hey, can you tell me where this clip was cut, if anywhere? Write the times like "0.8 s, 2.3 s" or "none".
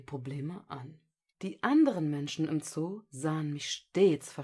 1.3 s